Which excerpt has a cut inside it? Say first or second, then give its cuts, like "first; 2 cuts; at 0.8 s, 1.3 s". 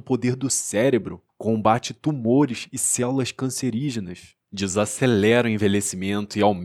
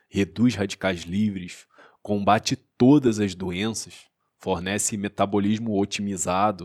first; 1 cut; at 1.3 s